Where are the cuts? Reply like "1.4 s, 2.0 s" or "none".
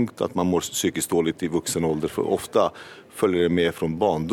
none